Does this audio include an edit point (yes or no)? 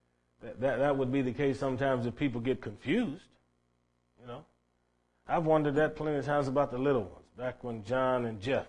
no